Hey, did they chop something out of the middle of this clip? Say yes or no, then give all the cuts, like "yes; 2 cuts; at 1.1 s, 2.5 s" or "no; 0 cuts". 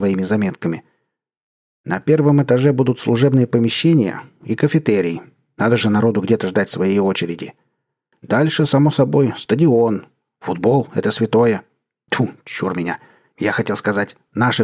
no; 0 cuts